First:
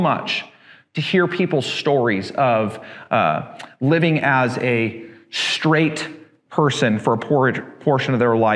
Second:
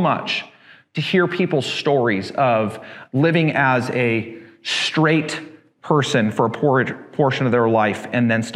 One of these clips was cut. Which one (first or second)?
second